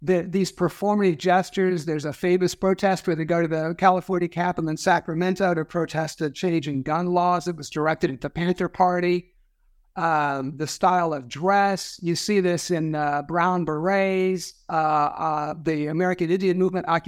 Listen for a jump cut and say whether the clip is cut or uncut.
uncut